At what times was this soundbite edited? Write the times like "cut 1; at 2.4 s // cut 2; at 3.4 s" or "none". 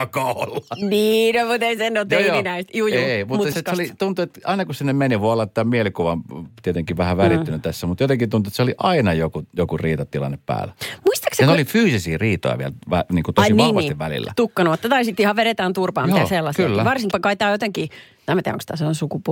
cut 1; at 3.5 s // cut 2; at 17.1 s